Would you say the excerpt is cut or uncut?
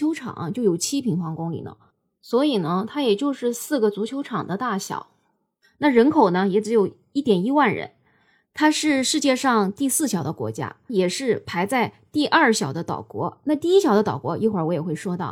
cut